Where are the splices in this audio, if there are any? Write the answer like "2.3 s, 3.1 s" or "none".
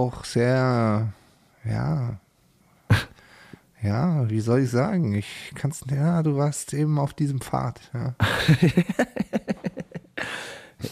none